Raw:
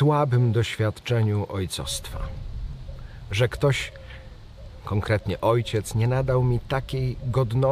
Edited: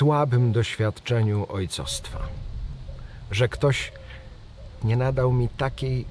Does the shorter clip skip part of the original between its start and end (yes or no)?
yes